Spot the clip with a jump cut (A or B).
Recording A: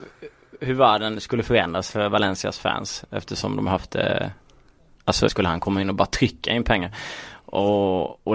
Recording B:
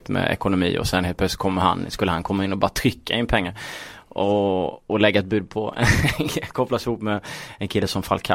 A